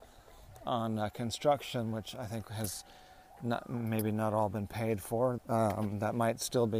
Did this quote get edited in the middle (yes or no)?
yes